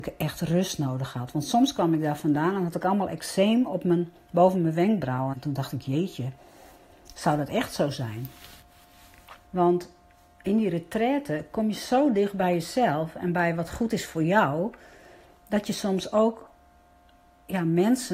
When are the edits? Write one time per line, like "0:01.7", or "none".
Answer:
0:05.3
0:09.4